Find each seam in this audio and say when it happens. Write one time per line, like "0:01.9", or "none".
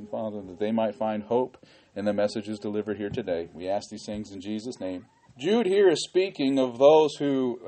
0:05.3